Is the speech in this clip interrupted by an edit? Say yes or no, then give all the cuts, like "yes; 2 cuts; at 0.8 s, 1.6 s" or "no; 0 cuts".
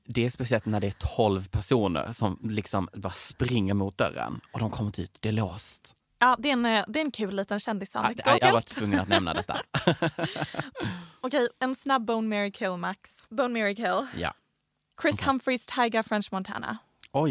yes; 2 cuts; at 8.4 s, 13.3 s